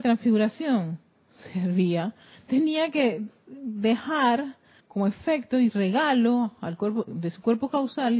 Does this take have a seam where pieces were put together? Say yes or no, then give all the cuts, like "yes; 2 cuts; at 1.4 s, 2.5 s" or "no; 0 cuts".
yes; 2 cuts; at 4.8 s, 7.1 s